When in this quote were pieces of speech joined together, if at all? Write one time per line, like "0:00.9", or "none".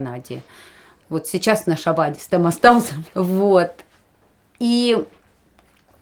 0:03.1